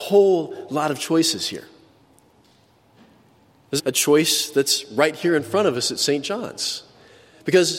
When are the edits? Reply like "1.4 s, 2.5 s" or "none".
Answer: 3.8 s